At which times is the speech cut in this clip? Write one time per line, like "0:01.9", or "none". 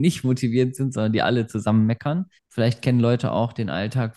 0:02.4